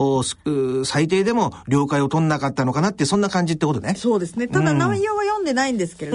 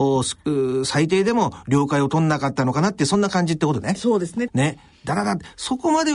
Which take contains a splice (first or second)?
second